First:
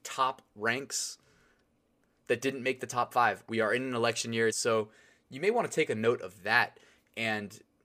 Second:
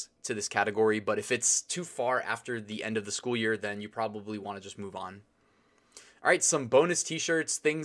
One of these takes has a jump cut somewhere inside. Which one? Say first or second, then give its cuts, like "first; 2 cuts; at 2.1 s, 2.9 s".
first; 2 cuts; at 3.5 s, 4.5 s